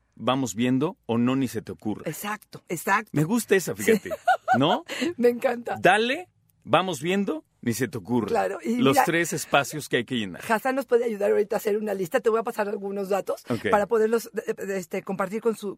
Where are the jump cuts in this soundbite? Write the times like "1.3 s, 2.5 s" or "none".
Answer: none